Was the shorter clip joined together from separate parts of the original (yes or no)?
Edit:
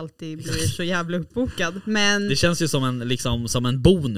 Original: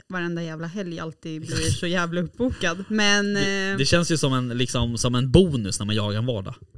yes